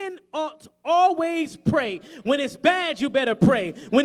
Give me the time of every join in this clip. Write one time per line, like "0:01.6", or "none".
none